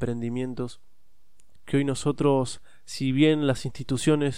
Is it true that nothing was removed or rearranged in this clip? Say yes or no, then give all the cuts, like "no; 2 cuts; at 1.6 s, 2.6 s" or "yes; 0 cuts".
no; 1 cut; at 1.6 s